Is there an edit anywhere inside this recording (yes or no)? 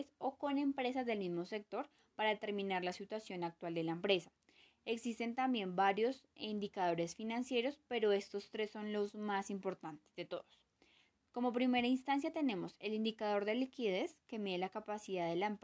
no